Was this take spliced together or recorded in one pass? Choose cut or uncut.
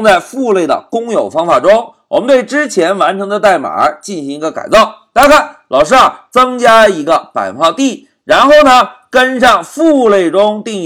uncut